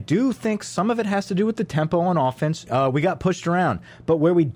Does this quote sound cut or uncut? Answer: cut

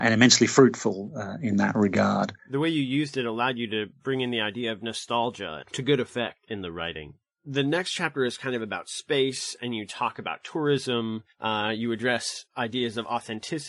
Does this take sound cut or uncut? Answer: uncut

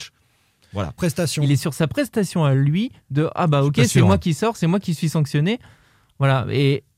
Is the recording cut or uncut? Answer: cut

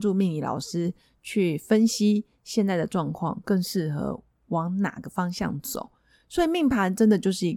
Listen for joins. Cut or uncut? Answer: uncut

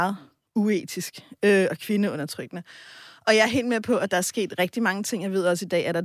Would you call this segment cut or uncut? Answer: uncut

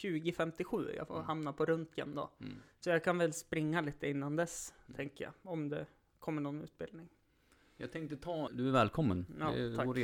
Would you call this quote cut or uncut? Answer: cut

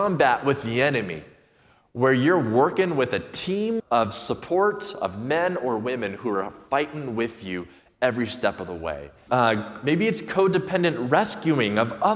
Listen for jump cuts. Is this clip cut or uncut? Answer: cut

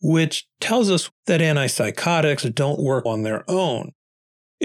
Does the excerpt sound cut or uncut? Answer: cut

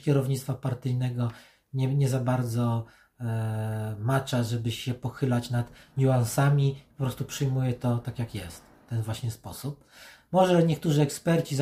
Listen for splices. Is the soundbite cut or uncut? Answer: uncut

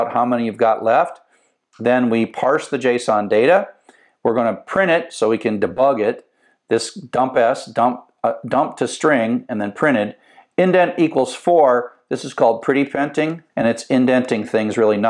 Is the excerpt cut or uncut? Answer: cut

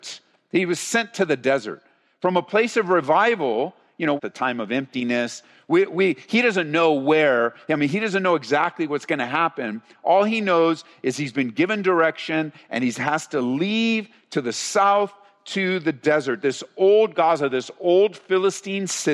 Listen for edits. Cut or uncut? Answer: cut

